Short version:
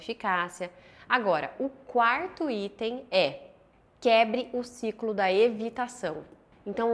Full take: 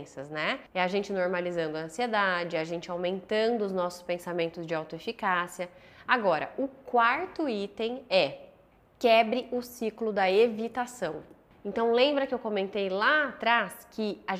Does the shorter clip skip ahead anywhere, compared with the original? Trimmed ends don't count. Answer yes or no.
no